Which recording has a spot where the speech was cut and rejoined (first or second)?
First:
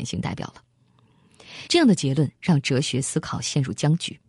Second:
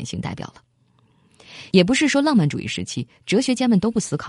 first